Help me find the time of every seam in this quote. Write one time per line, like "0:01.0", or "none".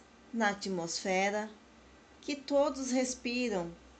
none